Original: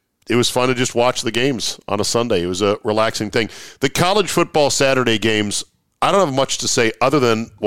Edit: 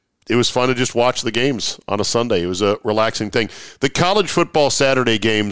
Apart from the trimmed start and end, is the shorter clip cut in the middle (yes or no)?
no